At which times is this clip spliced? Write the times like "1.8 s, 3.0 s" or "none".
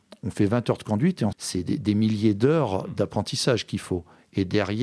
1.3 s